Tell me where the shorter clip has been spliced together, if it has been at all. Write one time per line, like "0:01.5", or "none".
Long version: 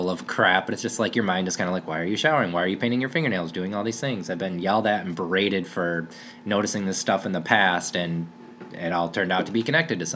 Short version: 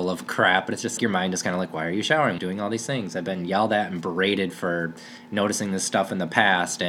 0:01.0
0:02.4